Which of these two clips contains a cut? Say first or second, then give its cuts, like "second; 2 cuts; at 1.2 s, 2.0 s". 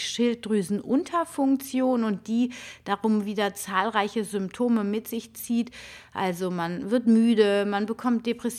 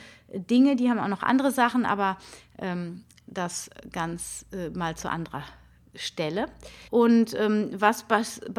second; 1 cut; at 6.9 s